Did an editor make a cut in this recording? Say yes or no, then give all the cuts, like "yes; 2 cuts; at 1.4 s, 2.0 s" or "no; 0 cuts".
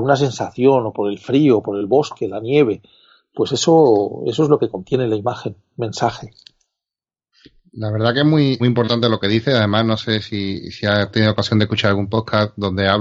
yes; 1 cut; at 8.6 s